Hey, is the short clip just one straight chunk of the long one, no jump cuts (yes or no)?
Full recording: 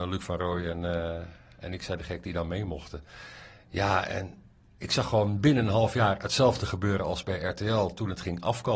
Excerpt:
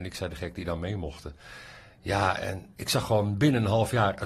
no